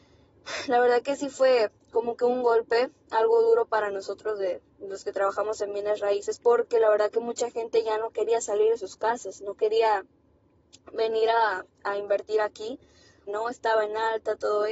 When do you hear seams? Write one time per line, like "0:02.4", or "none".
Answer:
0:13.3

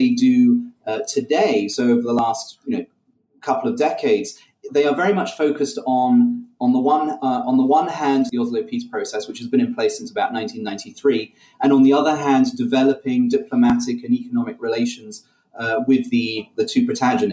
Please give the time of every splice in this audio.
0:08.3

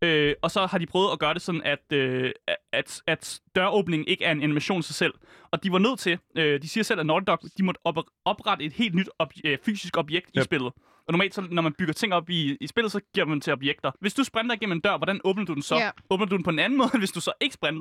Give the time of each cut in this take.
0:13.9

